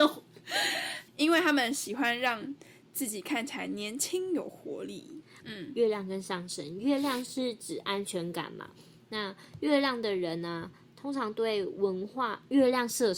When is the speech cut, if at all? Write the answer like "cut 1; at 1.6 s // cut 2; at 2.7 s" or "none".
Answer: cut 1; at 1.1 s // cut 2; at 5.4 s